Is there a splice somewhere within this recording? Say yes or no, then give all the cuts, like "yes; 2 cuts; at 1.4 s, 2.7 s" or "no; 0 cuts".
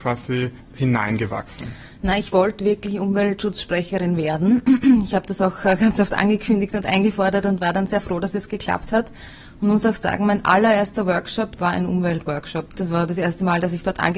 yes; 2 cuts; at 11.6 s, 12.8 s